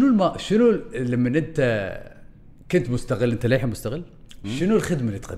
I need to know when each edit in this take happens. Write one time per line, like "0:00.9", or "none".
0:04.4